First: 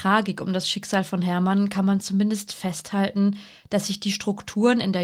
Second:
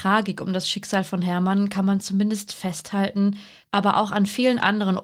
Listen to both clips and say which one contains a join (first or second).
second